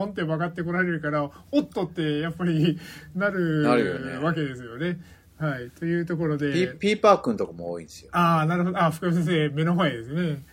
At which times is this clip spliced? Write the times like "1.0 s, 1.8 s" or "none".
none